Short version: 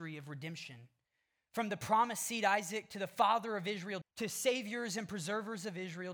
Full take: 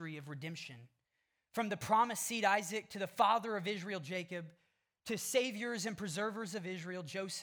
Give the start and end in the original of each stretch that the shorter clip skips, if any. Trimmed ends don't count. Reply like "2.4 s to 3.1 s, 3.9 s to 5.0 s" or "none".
4.0 s to 4.9 s